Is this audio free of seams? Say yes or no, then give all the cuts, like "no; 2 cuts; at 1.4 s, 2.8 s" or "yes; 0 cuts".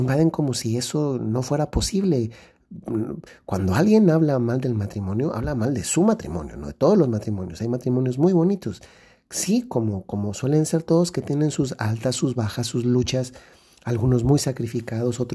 yes; 0 cuts